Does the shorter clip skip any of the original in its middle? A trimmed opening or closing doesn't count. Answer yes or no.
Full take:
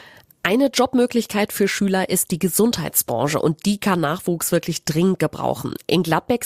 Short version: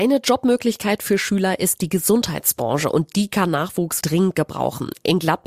yes